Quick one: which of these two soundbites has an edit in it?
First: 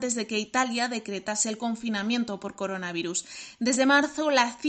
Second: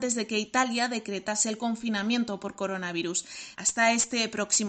second; 1 cut; at 3.5 s

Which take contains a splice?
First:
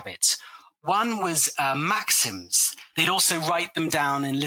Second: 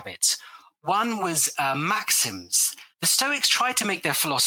first; 1 cut; at 2.9 s

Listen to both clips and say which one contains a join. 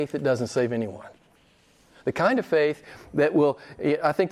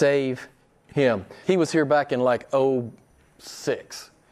second; 1 cut; at 1.4 s

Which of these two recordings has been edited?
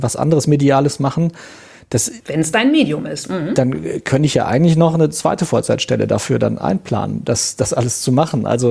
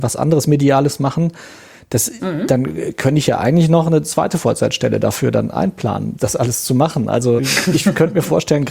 second; 3 cuts; at 2.2 s, 6.2 s, 7.4 s

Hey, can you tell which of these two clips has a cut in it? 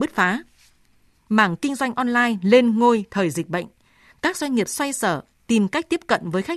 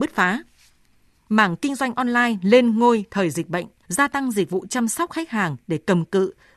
second; 1 cut; at 3.8 s

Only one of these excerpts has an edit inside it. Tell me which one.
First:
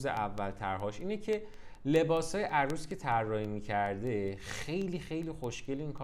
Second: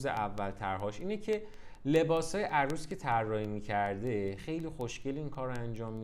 second; 1 cut; at 4.4 s

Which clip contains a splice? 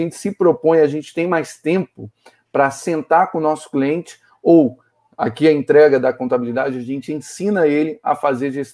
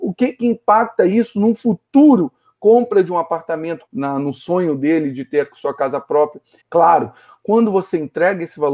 second; 2 cuts; at 3.9 s, 6.6 s

